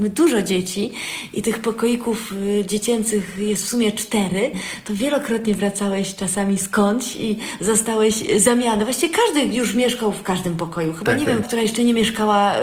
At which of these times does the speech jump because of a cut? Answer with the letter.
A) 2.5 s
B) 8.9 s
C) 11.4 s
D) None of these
C